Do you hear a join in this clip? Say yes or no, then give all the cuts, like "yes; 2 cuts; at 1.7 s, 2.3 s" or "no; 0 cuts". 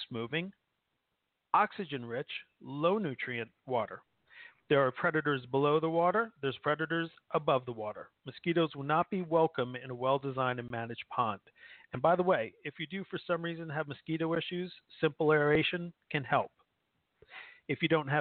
no; 0 cuts